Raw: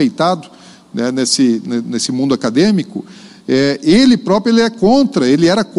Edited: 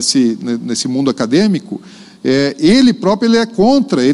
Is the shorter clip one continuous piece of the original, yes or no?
yes